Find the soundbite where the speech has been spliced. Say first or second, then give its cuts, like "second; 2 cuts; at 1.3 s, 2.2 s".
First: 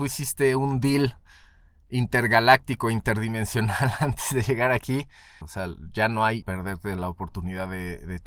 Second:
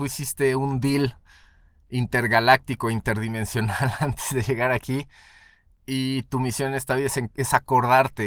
first; 2 cuts; at 5.4 s, 6.4 s